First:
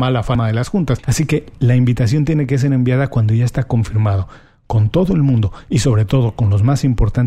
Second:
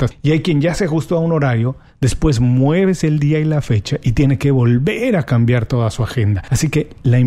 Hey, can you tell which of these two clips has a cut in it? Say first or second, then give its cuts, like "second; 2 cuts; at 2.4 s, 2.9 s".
first; 1 cut; at 1.0 s